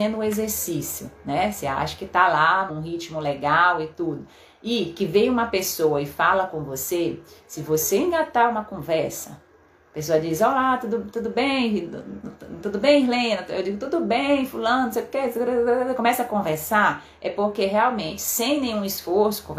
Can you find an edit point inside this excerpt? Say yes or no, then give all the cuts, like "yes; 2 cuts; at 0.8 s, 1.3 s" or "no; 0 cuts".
yes; 1 cut; at 2.7 s